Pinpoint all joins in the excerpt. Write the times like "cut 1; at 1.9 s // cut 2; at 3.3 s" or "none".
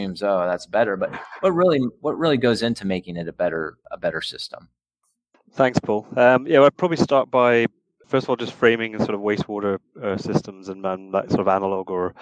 none